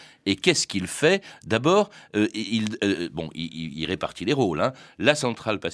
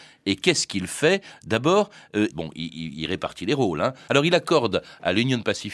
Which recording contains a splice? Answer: second; 2 cuts; at 2.3 s, 4.1 s

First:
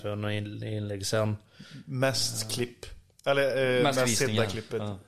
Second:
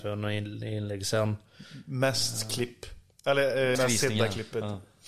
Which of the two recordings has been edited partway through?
second; 1 cut; at 3.7 s

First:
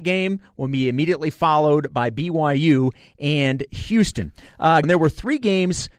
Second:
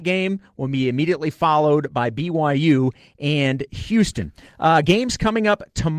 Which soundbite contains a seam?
first; 1 cut; at 4.8 s

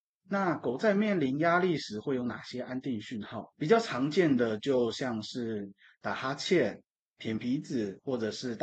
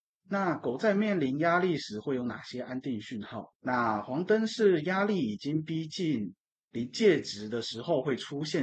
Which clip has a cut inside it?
second; 1 cut; at 3.5 s

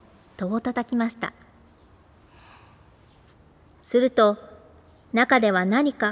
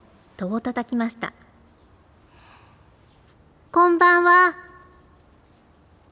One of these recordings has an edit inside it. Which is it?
first; 1 cut; at 3.7 s

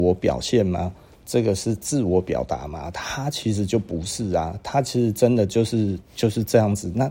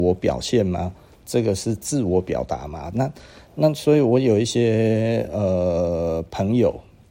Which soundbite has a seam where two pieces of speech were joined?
second; 1 cut; at 2.9 s

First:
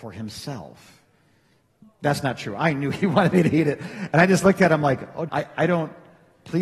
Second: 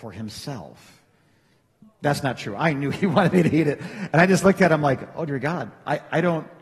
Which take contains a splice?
first; 1 cut; at 5.3 s

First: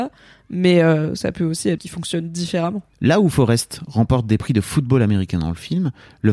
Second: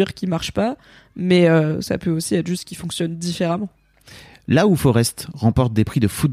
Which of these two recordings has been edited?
first; 2 cuts; at 1.8 s, 2.9 s

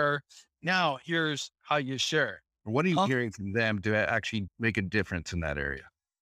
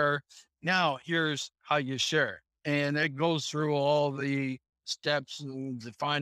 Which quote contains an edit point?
first; 1 cut; at 2.5 s

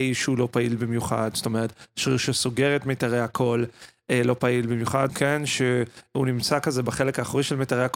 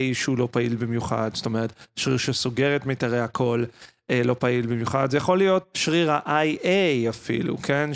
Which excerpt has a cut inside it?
first; 1 cut; at 5.1 s

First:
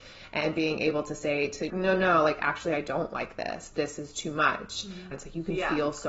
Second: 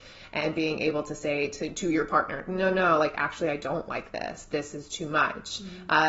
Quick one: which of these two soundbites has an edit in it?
first; 2 cuts; at 1.7 s, 5.1 s

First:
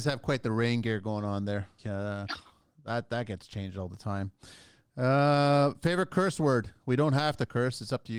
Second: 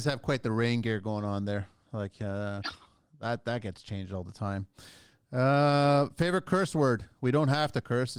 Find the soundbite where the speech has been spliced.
first; 1 cut; at 1.8 s

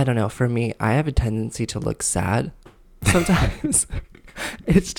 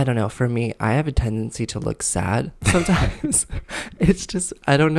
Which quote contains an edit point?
second; 2 cuts; at 2.6 s, 3.7 s

